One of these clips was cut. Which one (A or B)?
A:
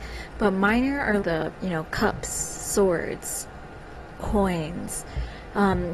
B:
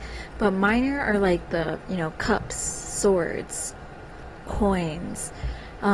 A